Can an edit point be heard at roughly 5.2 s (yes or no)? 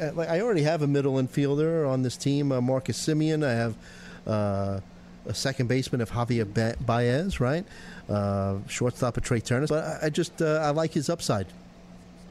no